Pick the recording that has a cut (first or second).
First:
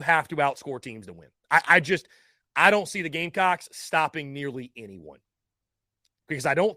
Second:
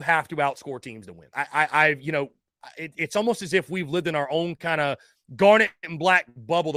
second